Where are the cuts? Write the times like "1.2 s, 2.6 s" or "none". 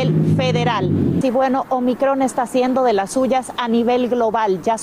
1.2 s